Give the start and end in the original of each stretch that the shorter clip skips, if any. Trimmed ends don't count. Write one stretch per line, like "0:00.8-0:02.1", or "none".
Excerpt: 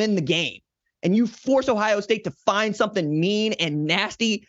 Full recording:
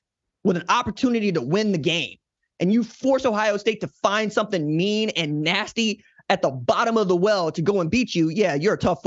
none